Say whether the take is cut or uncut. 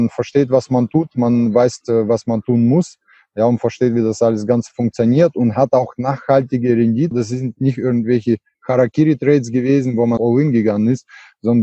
cut